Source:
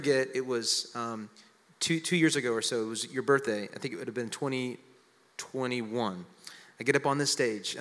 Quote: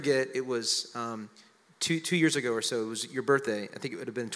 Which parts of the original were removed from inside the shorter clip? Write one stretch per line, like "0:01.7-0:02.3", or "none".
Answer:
none